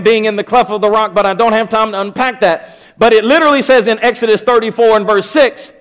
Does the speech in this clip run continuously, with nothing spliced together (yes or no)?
yes